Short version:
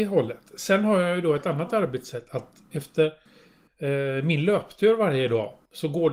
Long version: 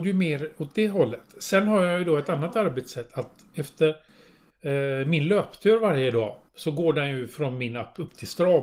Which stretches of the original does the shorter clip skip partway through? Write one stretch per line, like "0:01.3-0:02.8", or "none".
none

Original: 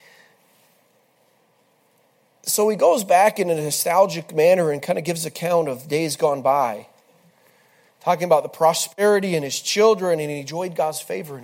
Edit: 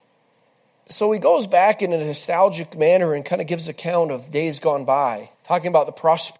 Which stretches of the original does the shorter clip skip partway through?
0:06.9-0:07.9

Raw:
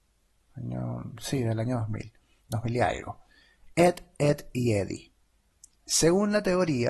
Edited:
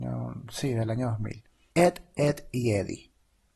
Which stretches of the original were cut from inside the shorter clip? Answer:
0:02.4-0:03.7

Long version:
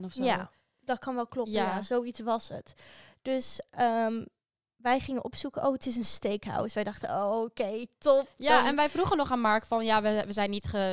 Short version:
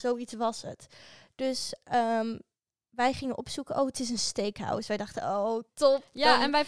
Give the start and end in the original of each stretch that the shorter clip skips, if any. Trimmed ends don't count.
0:07.6-0:07.9

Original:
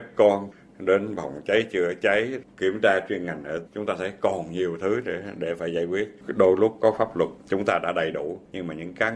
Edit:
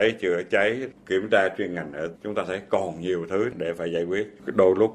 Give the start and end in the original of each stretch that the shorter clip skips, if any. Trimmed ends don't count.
0:05.0-0:05.3

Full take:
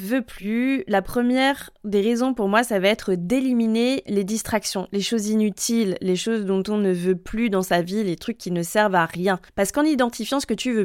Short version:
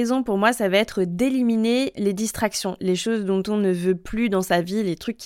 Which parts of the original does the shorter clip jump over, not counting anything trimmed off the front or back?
0:04.9-0:06.0

